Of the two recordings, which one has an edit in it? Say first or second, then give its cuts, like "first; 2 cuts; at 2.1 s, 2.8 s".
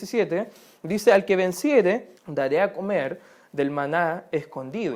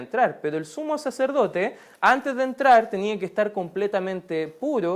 first; 1 cut; at 2.2 s